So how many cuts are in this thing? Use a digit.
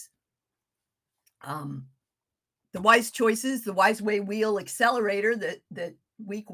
0